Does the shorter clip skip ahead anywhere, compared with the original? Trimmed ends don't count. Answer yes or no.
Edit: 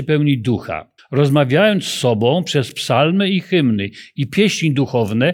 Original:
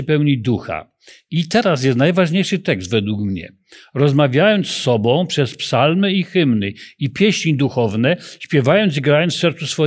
yes